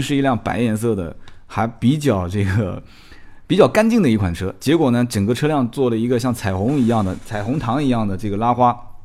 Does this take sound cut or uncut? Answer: uncut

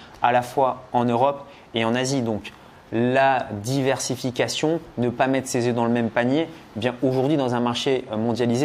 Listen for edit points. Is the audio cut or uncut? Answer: uncut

